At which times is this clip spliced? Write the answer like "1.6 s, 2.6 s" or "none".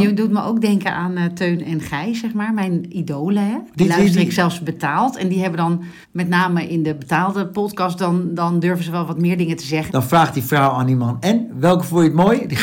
6.0 s, 9.9 s